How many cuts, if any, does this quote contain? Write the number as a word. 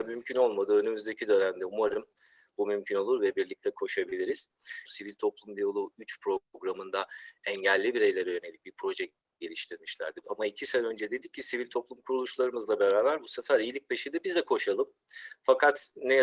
two